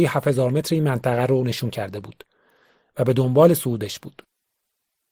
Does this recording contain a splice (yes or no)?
no